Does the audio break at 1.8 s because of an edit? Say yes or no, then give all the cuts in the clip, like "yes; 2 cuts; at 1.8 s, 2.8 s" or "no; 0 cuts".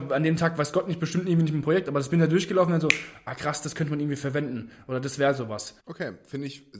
no; 1 cut; at 5.8 s